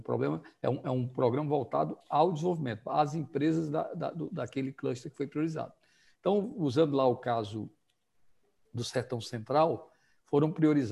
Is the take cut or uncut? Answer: uncut